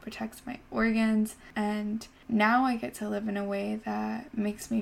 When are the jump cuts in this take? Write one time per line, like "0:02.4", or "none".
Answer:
0:01.5